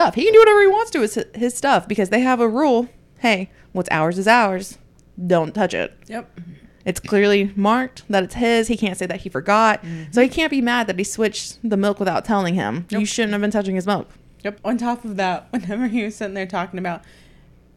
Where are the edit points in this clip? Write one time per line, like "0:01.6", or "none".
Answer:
0:14.6